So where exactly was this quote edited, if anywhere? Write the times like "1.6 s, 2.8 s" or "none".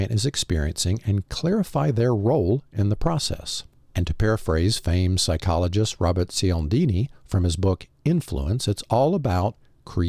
none